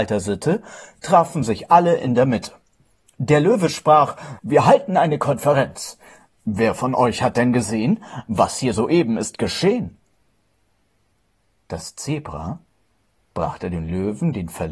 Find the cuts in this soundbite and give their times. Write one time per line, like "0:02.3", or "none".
0:04.4

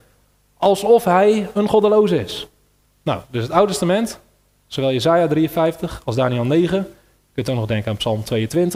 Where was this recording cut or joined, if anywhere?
0:02.8

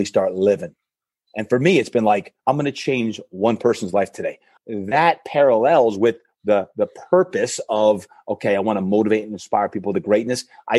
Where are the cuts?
0:02.4
0:04.6

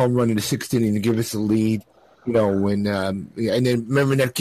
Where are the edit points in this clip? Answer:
none

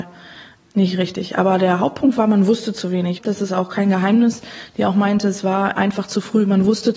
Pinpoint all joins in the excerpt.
0:03.2

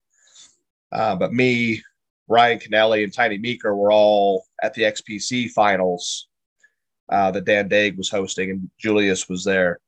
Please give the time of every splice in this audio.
none

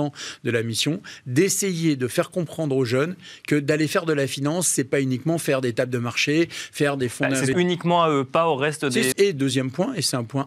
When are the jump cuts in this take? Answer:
0:07.5
0:09.1

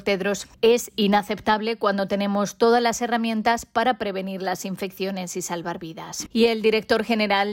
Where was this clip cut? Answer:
0:06.3

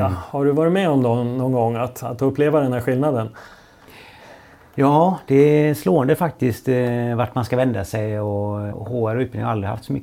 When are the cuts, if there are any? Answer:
0:08.7

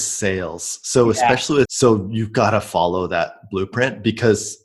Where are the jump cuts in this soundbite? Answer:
0:01.7

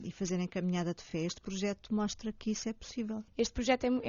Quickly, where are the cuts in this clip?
none

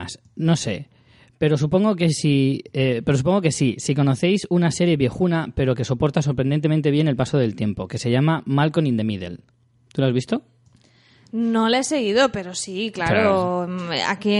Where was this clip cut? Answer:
none

